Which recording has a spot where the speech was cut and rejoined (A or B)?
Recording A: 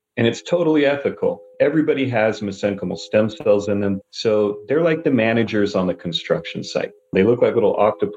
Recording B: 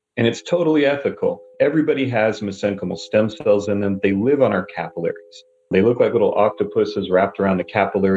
A